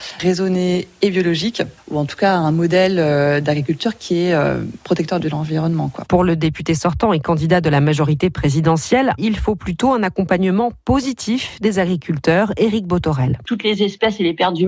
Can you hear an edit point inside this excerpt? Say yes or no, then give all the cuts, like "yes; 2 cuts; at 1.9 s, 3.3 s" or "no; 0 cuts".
yes; 2 cuts; at 9.2 s, 13.4 s